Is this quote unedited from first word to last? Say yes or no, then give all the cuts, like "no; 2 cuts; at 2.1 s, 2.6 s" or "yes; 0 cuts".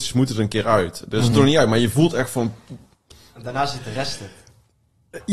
no; 1 cut; at 1.3 s